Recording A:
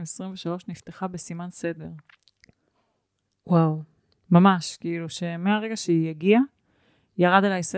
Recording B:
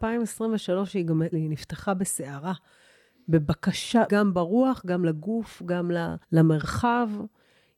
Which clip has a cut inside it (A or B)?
B